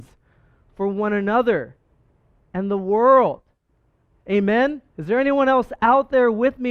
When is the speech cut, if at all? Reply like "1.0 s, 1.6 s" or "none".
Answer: 4.9 s